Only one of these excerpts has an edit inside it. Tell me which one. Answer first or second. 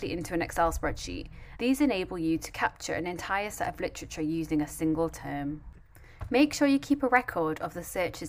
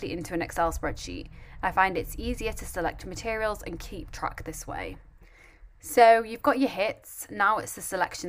first